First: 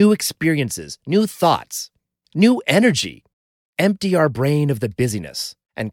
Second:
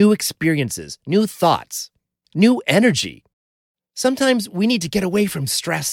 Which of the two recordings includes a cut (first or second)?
first